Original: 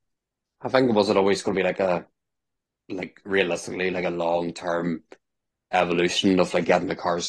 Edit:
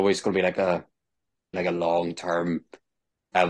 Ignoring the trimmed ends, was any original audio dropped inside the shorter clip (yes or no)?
yes